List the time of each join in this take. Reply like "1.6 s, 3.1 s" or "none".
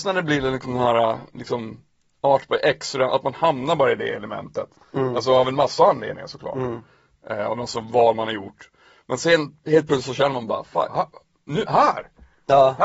10.9 s